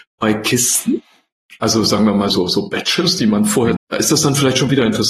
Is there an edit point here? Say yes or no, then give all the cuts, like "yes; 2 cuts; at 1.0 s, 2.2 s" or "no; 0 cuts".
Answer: yes; 2 cuts; at 2.3 s, 3.8 s